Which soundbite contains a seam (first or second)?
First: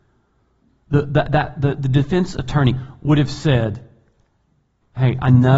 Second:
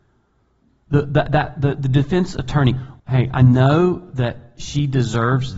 second